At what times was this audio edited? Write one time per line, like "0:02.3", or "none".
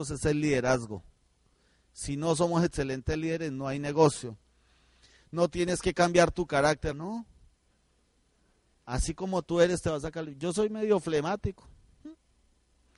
0:06.9